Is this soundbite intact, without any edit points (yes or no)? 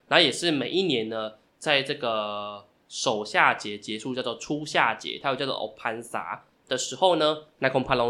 yes